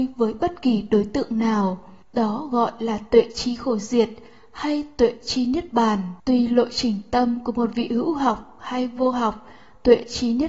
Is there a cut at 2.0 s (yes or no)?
yes